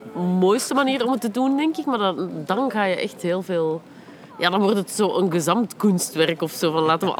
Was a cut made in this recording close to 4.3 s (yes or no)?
yes